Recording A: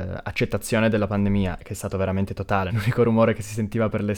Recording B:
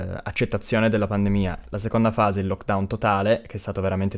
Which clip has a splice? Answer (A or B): A